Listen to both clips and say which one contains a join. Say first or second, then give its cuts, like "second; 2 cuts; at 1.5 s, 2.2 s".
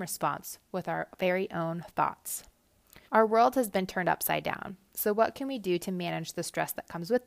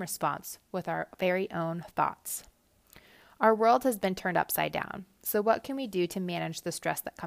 first; 1 cut; at 3.1 s